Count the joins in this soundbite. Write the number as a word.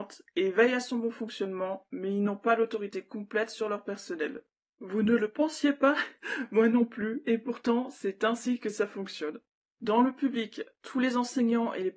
one